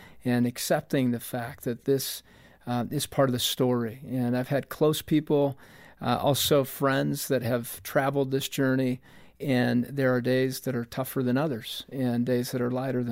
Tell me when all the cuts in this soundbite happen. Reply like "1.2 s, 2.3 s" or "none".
none

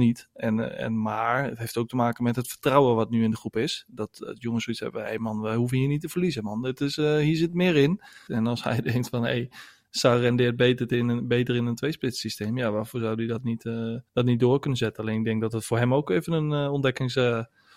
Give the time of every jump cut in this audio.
8.3 s, 14.1 s

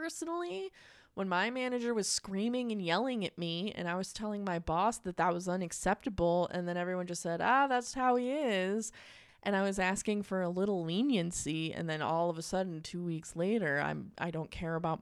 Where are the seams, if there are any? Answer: 7.9 s, 9.3 s

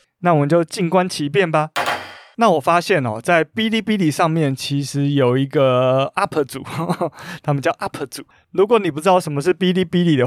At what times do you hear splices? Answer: none

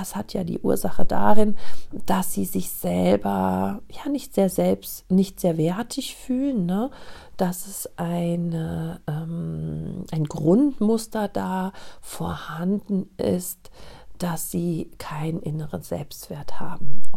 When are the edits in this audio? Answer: none

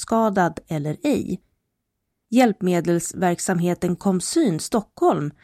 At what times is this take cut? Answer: 2.3 s

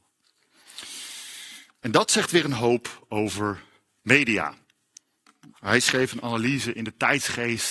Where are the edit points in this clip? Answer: 5.5 s

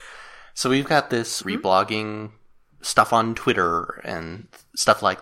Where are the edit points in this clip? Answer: 1.4 s

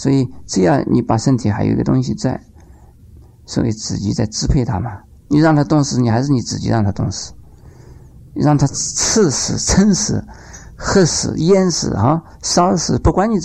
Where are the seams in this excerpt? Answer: none

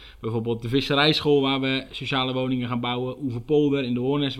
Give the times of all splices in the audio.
none

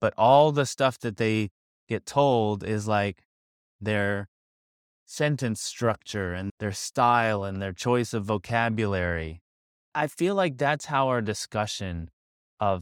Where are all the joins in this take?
9.9 s

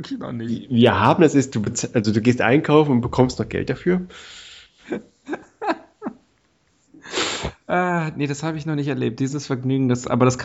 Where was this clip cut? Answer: none

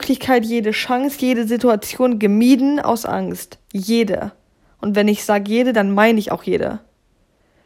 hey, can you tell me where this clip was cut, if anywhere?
none

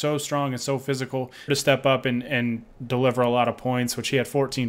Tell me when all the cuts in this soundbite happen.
1.5 s, 2.7 s

